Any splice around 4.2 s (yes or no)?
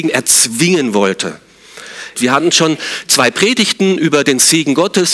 no